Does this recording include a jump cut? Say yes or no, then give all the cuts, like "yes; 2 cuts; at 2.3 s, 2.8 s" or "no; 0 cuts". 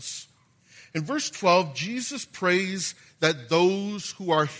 no; 0 cuts